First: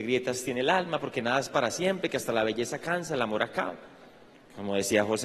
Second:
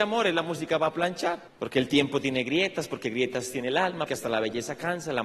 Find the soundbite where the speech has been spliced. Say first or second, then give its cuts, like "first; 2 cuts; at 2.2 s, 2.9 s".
second; 2 cuts; at 1.5 s, 4.1 s